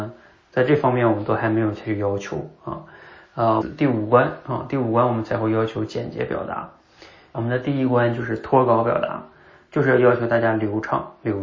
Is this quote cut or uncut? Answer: cut